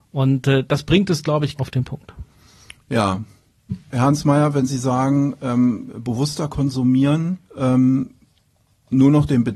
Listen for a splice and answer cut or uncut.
cut